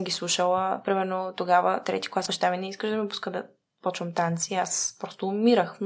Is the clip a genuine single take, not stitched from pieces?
no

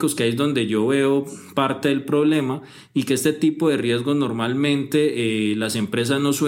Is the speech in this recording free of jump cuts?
yes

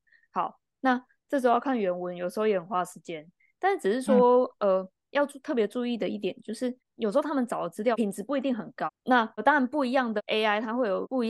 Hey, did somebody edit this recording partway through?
yes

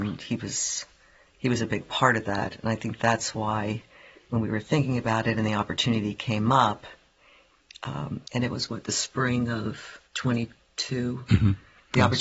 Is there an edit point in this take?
yes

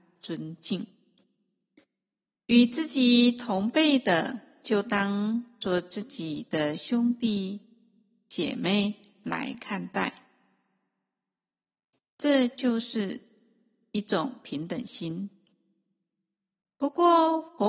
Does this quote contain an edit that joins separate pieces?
no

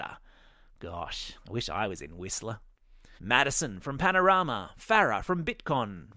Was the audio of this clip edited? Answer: yes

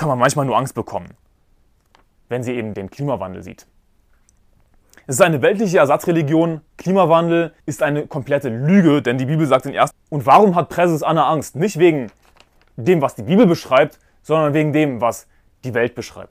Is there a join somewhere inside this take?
yes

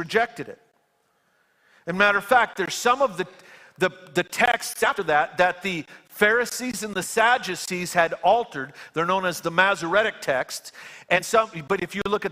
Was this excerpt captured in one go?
yes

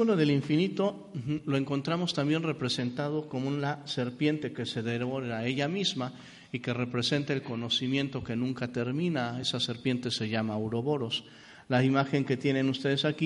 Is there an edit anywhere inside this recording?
no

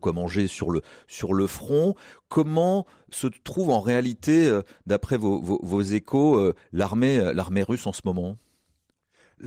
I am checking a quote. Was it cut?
no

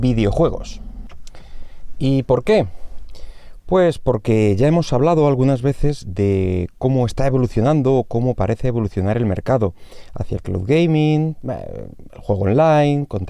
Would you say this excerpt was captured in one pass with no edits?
yes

